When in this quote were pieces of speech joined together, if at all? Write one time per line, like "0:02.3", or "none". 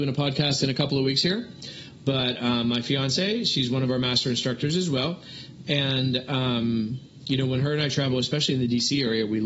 none